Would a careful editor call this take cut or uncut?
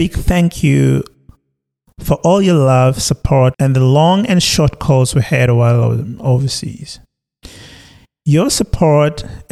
cut